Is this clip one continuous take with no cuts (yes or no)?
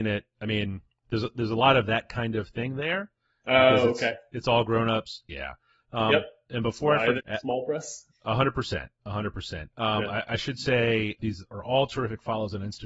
no